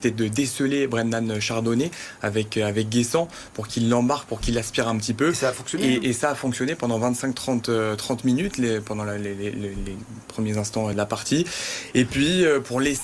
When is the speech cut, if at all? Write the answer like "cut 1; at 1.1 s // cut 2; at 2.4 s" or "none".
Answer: cut 1; at 10.9 s